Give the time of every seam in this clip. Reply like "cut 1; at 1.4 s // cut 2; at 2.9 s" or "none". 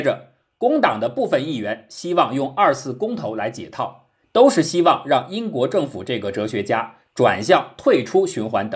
cut 1; at 4.2 s